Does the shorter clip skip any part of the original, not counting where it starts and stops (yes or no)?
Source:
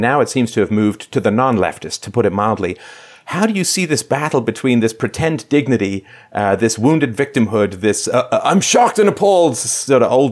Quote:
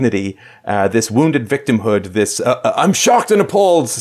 no